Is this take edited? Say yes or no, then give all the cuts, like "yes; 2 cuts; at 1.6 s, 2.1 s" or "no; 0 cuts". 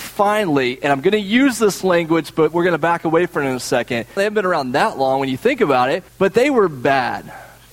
yes; 2 cuts; at 4.2 s, 6.1 s